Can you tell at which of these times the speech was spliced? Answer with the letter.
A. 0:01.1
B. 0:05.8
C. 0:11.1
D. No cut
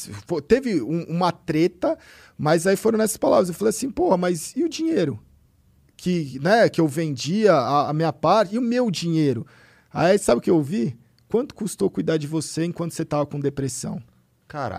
D